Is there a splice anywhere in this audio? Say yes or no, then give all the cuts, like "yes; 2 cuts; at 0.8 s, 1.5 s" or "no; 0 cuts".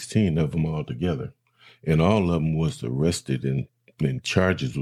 no; 0 cuts